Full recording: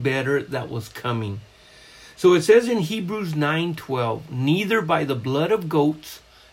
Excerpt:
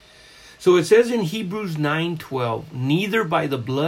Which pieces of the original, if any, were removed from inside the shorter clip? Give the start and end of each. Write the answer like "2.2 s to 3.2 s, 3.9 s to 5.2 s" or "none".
none